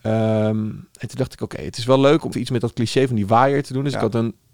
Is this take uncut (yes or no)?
no